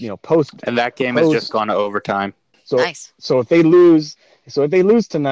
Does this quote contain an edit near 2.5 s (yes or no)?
yes